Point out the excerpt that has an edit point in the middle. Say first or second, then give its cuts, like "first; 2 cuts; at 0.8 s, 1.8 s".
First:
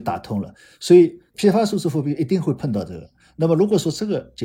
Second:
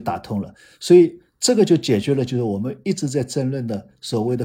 first; 1 cut; at 1.3 s